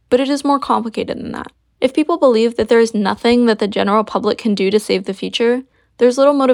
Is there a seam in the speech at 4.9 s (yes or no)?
no